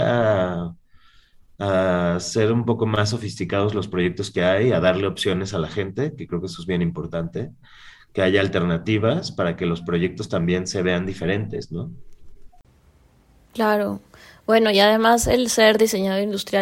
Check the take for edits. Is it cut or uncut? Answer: uncut